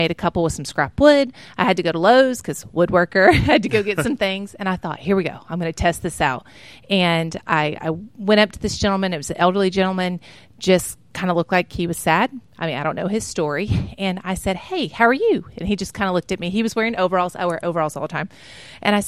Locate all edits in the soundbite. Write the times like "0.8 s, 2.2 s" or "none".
none